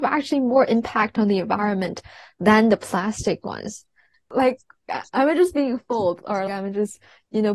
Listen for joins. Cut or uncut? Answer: cut